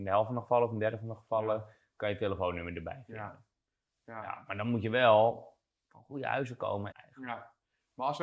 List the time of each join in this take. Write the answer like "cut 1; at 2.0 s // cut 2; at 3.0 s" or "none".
cut 1; at 6.9 s